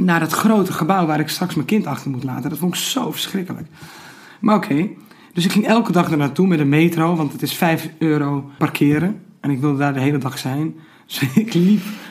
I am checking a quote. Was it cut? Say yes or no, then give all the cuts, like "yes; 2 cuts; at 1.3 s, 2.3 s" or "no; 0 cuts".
yes; 1 cut; at 8.6 s